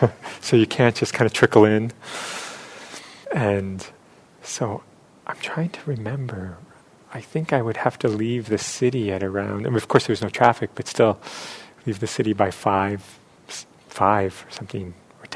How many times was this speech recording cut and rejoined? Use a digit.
1